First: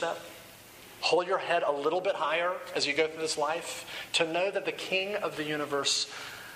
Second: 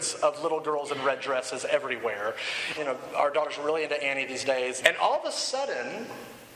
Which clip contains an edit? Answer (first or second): second